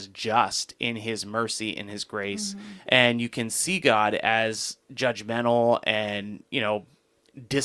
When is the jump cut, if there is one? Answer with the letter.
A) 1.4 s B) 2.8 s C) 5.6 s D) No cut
B